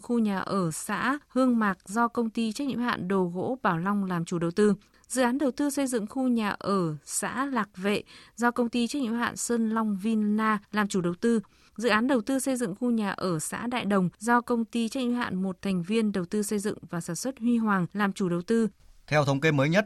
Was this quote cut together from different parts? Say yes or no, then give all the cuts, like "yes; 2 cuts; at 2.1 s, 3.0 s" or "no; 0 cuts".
no; 0 cuts